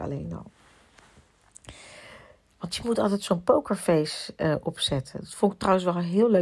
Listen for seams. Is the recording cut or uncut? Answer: uncut